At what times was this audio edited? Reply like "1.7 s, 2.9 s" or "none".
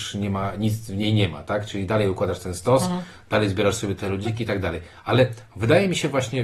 4.0 s